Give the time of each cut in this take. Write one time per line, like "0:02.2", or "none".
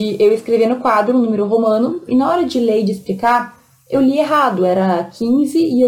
0:02.1